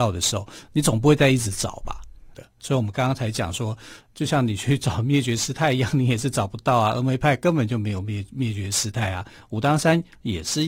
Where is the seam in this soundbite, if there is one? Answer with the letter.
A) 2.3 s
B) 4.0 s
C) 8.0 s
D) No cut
A